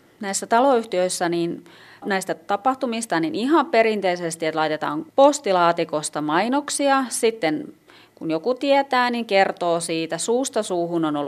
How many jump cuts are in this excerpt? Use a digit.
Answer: 1